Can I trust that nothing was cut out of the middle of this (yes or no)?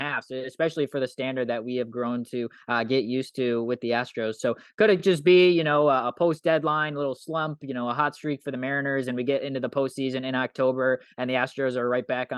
yes